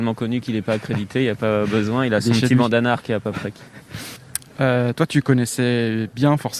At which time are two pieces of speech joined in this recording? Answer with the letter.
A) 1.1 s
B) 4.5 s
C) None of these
C